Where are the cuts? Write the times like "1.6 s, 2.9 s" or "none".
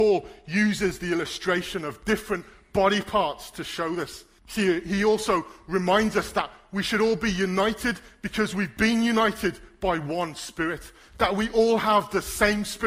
4.4 s